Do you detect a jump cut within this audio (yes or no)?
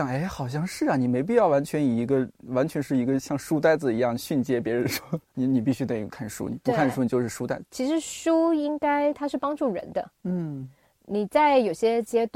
yes